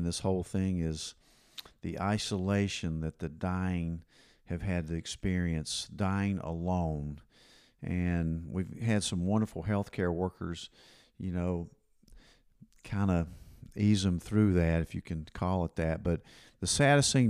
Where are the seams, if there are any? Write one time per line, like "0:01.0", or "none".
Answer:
none